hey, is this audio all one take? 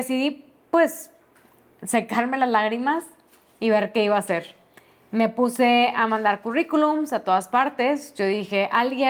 yes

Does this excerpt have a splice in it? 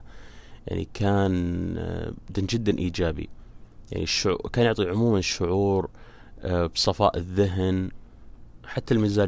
yes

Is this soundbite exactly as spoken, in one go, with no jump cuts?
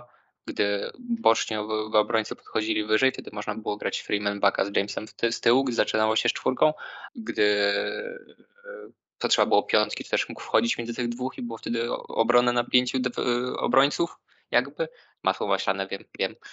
no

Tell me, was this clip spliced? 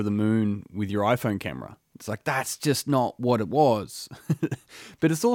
no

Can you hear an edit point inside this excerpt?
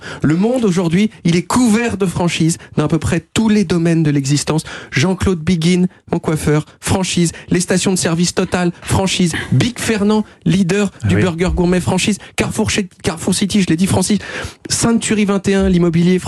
no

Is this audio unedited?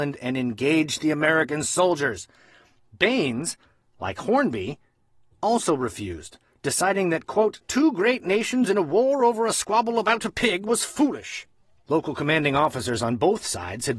yes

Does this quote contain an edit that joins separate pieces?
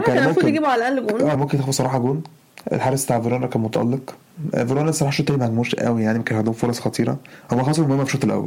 yes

